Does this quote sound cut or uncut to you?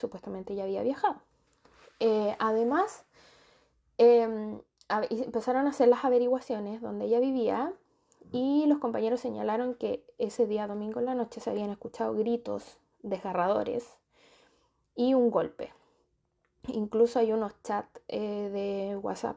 uncut